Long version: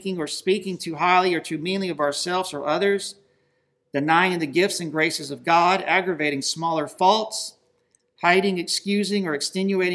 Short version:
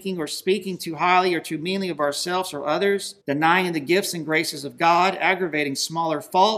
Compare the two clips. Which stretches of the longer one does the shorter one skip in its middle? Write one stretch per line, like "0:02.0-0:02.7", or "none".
0:03.2-0:03.9